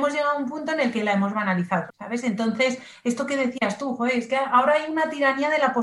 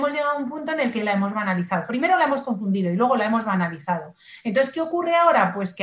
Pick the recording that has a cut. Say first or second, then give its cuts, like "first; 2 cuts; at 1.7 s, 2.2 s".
first; 1 cut; at 1.9 s